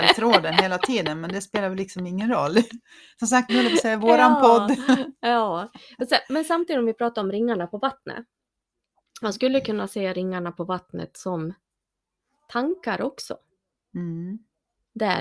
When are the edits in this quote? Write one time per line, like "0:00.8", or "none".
0:03.5